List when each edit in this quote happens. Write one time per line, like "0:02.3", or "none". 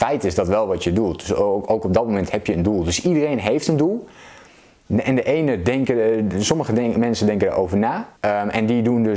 0:08.2